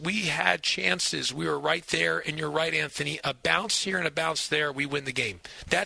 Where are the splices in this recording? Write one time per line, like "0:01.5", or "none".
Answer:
none